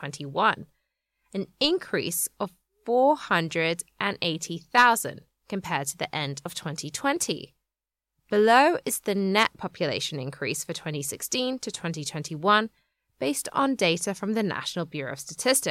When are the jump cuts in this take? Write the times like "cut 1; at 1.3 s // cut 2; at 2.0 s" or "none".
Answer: none